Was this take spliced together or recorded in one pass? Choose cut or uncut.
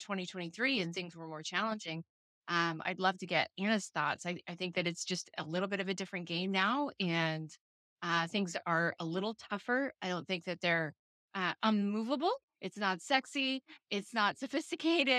cut